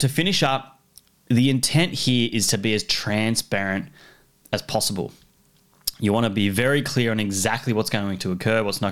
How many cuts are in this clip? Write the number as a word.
zero